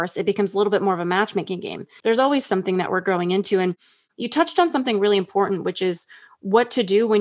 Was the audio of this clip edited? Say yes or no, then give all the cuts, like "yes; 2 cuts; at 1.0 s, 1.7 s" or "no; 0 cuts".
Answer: yes; 1 cut; at 2.0 s